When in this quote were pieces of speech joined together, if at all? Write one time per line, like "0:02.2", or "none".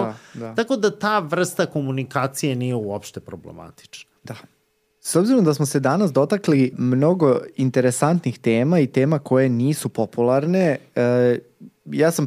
0:06.7